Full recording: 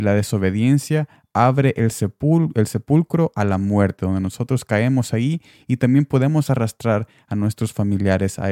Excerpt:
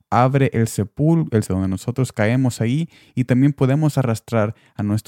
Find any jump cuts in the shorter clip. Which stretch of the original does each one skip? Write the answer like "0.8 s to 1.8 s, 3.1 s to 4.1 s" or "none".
2.7 s to 4.0 s